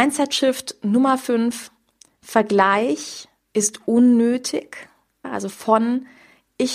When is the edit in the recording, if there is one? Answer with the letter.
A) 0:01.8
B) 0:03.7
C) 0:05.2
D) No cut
C